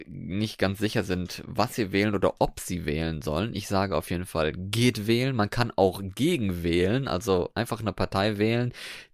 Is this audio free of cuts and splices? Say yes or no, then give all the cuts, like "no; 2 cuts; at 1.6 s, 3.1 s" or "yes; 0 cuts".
yes; 0 cuts